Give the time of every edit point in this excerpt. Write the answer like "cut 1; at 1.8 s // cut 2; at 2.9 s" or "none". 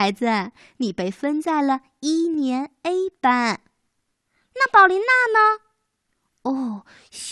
none